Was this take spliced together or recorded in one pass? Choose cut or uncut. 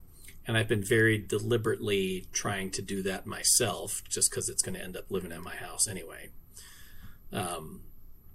uncut